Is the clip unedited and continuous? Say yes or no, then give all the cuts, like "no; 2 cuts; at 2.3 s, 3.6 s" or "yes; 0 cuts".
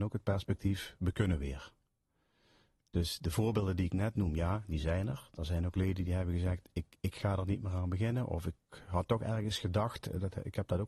yes; 0 cuts